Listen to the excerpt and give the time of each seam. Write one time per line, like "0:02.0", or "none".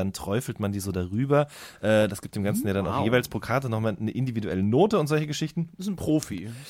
none